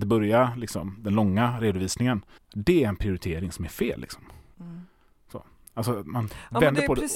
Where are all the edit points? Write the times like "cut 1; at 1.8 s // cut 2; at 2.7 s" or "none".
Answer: cut 1; at 2.4 s // cut 2; at 4.5 s